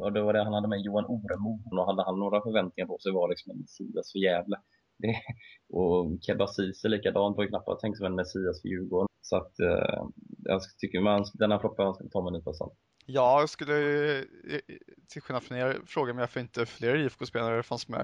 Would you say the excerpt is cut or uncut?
cut